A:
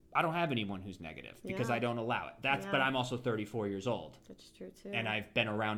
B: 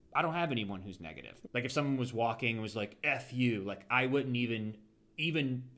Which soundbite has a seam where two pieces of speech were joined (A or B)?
B